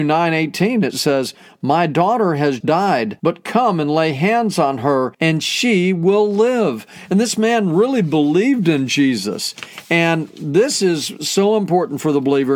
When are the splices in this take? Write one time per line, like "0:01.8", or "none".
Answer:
0:02.6